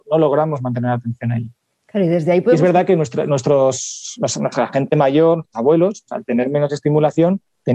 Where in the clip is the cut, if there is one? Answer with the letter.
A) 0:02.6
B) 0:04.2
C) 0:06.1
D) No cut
C